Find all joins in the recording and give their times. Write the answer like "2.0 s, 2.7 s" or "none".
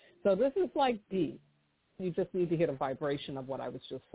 2.0 s